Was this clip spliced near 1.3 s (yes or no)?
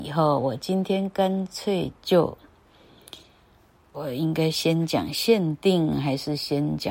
no